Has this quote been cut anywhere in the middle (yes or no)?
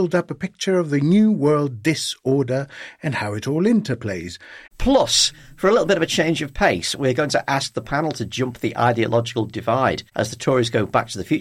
yes